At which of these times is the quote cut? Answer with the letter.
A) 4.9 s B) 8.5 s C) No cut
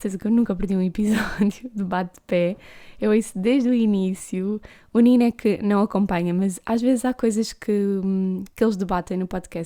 C